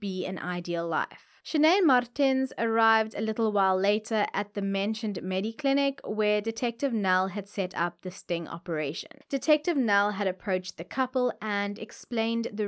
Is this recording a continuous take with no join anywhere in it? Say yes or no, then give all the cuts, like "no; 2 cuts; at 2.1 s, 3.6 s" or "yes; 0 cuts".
no; 1 cut; at 1.4 s